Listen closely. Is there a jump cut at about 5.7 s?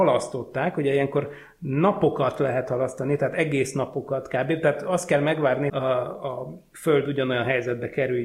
yes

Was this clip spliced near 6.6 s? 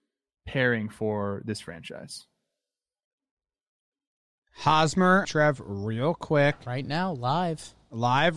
no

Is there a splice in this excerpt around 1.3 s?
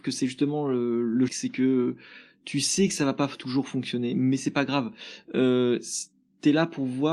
yes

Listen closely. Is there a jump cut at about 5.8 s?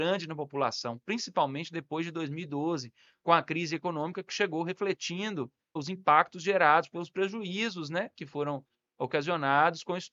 yes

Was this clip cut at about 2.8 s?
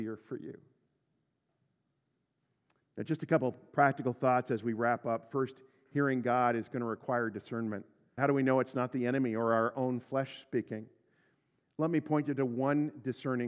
no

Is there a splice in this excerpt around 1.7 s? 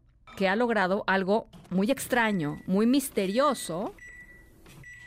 yes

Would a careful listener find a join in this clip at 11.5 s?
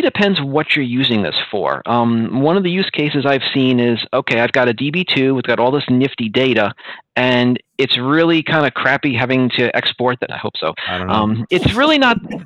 yes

